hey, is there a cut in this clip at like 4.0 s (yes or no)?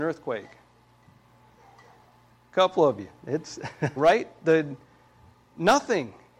yes